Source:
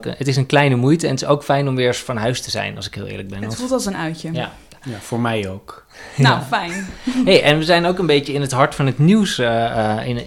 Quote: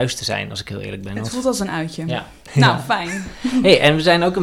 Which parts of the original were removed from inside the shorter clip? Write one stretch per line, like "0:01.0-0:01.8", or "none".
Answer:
0:04.7-0:06.1